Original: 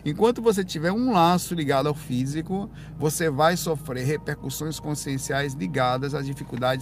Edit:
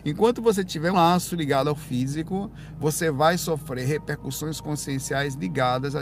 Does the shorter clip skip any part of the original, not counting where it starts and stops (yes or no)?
yes